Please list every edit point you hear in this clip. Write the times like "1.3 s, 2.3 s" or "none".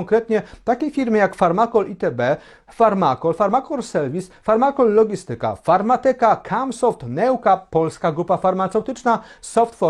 none